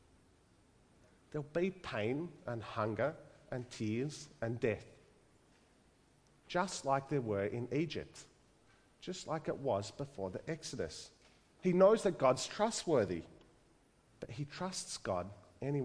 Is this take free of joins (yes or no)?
no